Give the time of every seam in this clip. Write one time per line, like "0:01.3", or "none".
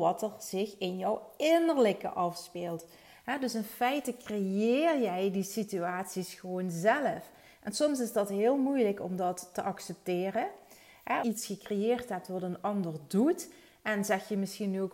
0:11.2